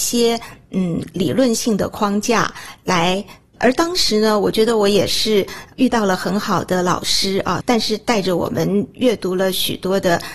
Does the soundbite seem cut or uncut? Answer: cut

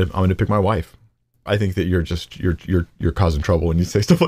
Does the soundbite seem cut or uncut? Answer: cut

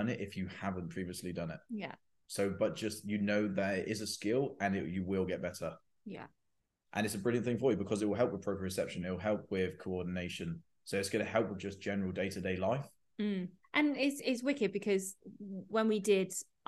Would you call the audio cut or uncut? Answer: cut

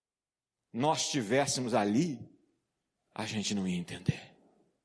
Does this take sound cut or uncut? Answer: uncut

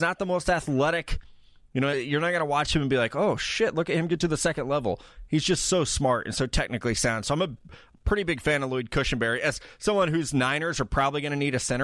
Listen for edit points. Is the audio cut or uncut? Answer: uncut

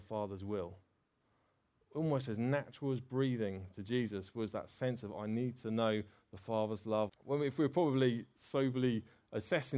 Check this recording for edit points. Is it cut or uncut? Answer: cut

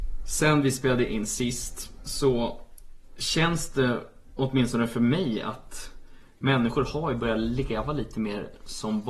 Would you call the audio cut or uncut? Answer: uncut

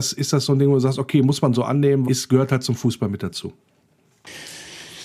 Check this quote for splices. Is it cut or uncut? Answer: cut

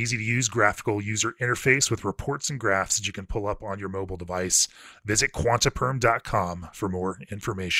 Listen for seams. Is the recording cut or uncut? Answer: uncut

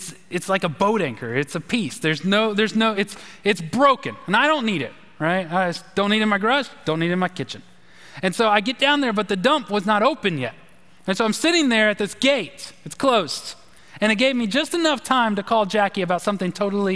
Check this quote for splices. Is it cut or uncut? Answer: uncut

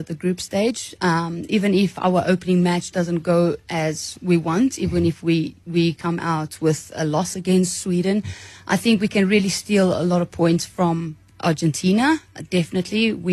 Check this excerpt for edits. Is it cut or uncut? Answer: uncut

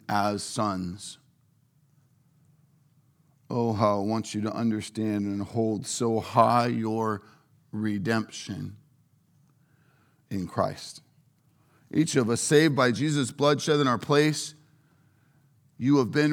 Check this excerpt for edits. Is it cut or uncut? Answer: uncut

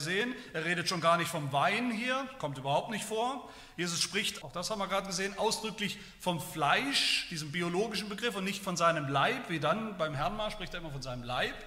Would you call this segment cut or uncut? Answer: cut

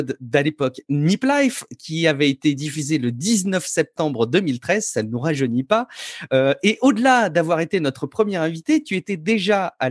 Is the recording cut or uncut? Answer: uncut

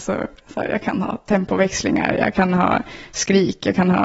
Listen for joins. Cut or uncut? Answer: uncut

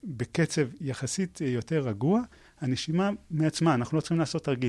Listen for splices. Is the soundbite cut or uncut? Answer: uncut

